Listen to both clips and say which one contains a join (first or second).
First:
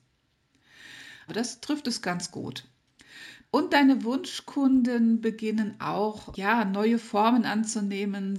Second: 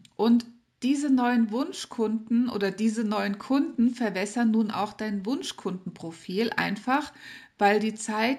first